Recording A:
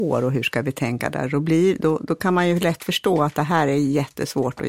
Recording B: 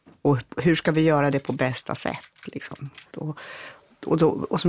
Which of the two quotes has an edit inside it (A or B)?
B